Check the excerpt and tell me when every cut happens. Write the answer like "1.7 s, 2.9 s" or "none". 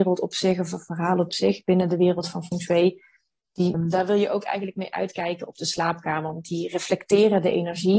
3.7 s

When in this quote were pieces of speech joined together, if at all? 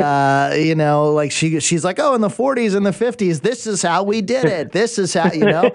none

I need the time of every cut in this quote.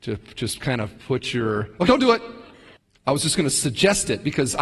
1.9 s

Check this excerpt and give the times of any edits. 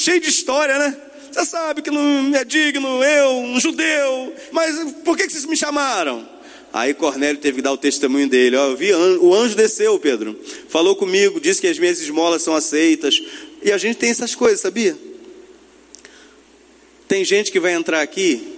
4.5 s

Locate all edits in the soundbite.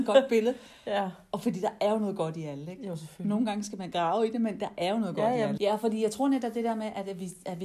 5.6 s

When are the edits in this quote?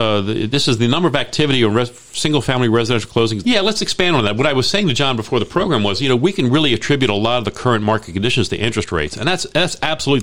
3.4 s

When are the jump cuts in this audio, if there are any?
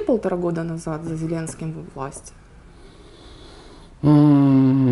none

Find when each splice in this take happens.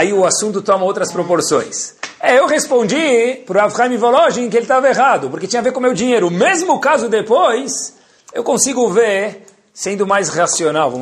none

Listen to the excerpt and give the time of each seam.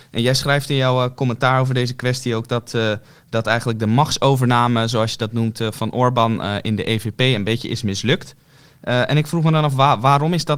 none

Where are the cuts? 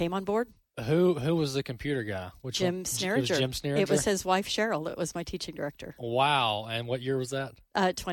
none

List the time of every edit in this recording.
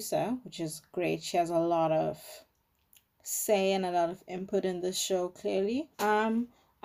5.9 s

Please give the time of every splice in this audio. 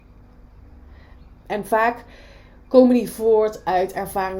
1.4 s

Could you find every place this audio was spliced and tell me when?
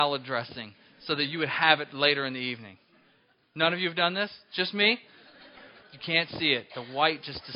5.8 s

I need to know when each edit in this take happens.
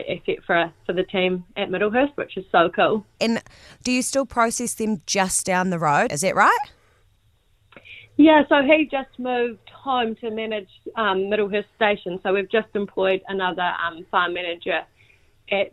3.2 s, 6.1 s, 8.9 s

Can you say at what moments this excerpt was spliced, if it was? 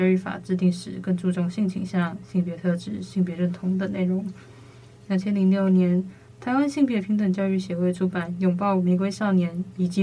none

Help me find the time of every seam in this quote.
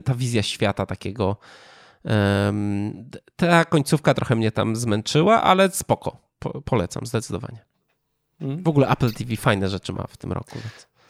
none

